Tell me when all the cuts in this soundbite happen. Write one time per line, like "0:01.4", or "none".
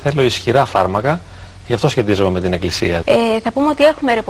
0:03.0